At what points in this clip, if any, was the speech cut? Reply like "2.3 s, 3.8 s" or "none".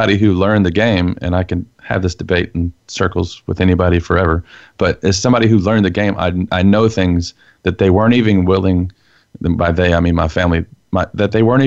none

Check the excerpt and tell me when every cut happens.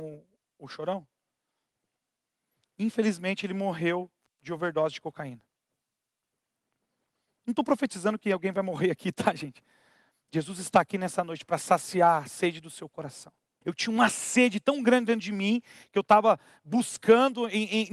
10.1 s, 13.6 s

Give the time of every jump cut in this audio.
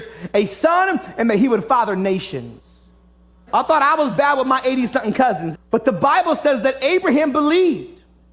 3.5 s, 5.5 s

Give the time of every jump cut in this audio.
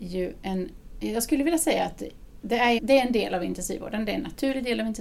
2.8 s

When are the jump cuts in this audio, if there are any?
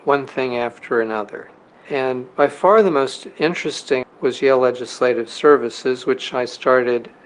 4.0 s

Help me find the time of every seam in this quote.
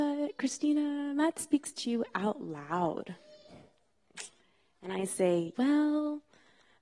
5.5 s

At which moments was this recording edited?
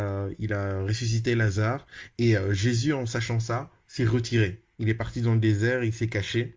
2.1 s

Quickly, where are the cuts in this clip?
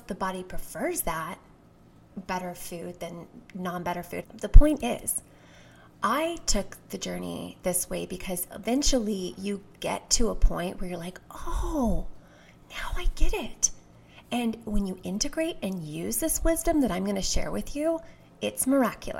4.2 s

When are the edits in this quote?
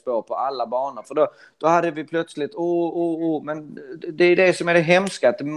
none

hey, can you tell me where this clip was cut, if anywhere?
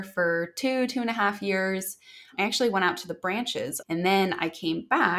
3.8 s

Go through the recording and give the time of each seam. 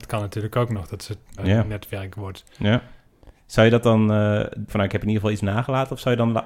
1.4 s, 4.7 s

